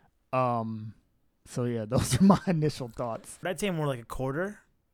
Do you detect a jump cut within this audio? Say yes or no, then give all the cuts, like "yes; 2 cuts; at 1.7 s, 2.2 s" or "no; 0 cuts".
yes; 1 cut; at 3.4 s